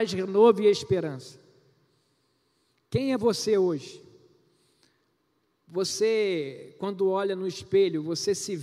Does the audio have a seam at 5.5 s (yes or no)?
yes